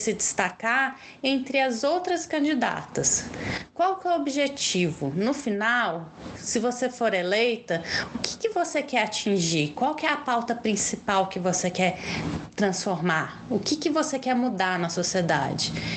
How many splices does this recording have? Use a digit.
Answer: 0